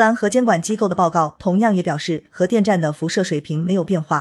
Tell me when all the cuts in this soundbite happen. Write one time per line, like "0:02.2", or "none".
none